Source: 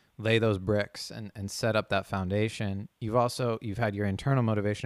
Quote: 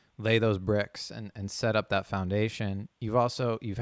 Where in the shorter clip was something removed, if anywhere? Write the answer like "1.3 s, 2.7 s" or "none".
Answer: none